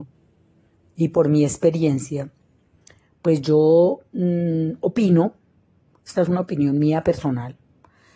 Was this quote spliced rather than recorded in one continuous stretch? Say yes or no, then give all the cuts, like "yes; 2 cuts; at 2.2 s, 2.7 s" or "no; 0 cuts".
no; 0 cuts